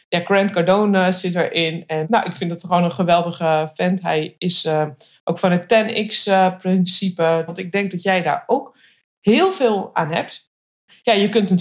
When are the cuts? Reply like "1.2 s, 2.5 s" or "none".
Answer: 7.5 s